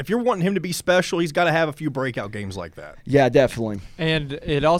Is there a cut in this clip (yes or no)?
no